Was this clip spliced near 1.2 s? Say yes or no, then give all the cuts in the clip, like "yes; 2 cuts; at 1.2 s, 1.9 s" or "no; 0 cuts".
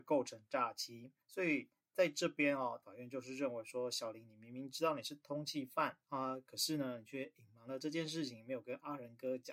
yes; 3 cuts; at 1.2 s, 2.8 s, 6.0 s